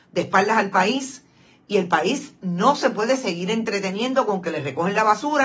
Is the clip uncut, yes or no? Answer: yes